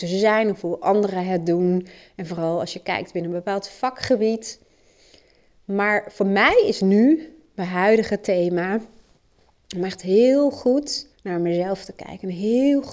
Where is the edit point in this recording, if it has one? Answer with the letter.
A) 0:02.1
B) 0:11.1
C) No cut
B